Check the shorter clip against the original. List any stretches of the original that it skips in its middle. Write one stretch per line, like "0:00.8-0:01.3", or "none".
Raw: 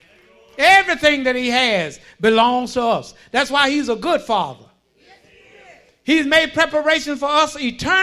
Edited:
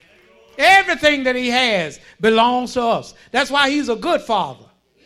none